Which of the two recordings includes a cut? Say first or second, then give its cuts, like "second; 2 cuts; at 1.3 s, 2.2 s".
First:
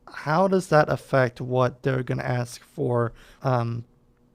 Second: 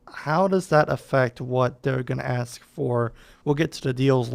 first; 1 cut; at 3.4 s